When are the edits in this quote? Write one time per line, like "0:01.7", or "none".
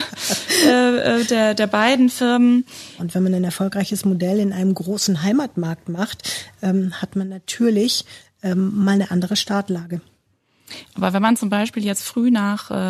0:03.0